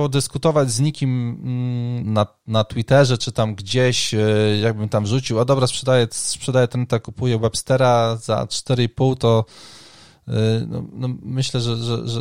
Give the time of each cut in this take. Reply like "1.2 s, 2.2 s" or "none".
2.0 s